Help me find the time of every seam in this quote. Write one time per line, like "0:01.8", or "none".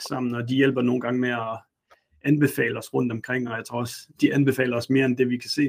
none